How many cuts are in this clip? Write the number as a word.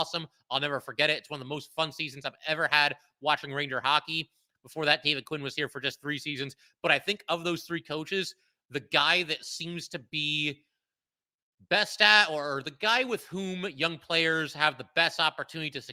one